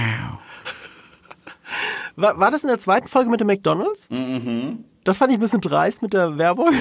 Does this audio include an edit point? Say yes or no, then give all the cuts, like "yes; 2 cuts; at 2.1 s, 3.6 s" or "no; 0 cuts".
no; 0 cuts